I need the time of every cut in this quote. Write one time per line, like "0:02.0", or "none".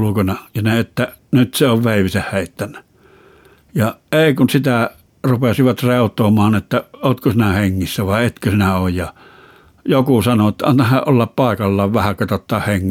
none